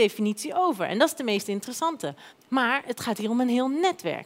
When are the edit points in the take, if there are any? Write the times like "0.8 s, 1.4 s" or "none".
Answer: 2.3 s